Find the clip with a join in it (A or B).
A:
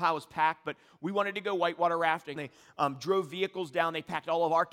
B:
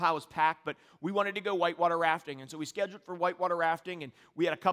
A